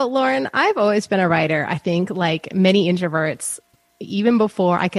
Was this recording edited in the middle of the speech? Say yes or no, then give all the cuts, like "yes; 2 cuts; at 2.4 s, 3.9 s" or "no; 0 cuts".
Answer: no; 0 cuts